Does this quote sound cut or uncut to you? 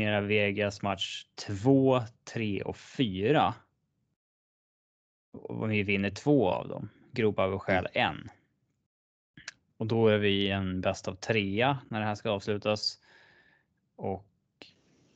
uncut